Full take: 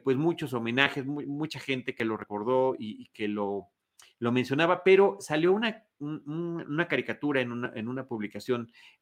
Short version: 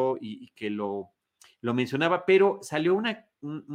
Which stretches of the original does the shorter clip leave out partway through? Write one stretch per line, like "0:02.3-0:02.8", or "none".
none

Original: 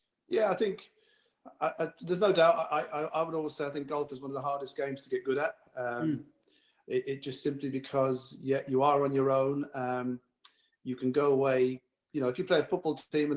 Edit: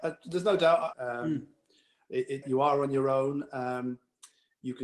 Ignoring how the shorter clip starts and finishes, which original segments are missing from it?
0:02.7-0:05.7
0:07.2-0:08.6

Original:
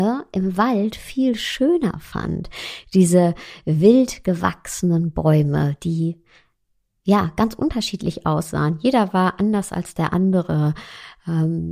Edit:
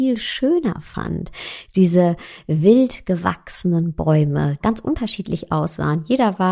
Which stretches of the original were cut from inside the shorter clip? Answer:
0:05.8-0:07.3

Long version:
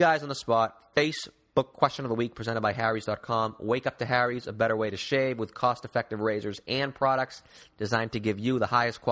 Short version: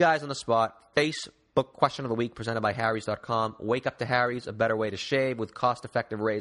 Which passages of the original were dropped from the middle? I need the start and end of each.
none

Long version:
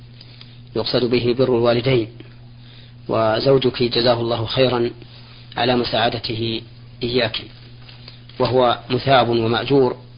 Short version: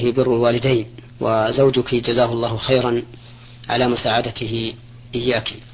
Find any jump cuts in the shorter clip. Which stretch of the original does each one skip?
0:02.3-0:03.0

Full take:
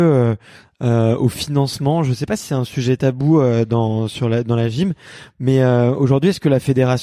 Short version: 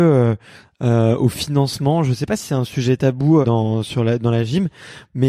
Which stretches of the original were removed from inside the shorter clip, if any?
0:03.4-0:03.7

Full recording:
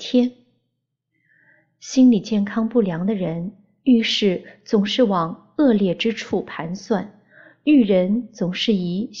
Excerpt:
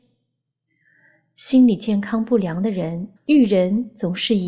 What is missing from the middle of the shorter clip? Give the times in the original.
0:03.6-0:07.5

